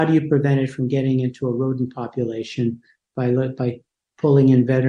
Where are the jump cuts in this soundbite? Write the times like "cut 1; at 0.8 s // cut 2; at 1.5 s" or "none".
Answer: none